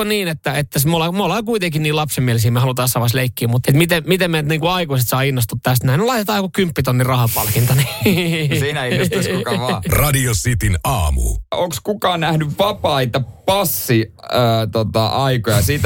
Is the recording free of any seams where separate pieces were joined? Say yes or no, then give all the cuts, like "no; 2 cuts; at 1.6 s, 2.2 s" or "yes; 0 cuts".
no; 1 cut; at 3.6 s